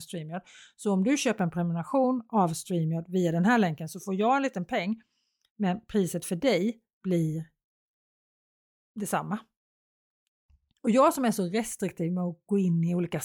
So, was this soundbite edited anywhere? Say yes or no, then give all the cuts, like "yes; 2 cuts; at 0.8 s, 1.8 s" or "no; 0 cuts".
yes; 1 cut; at 10.7 s